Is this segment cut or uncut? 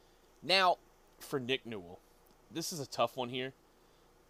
uncut